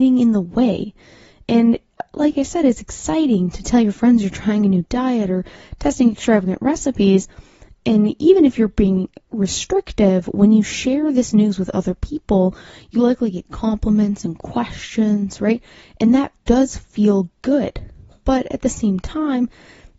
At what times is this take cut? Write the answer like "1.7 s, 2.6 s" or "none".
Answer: none